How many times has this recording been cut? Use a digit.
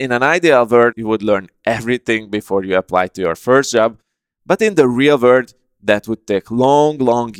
1